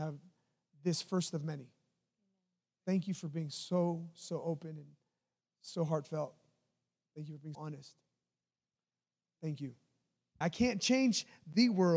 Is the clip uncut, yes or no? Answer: no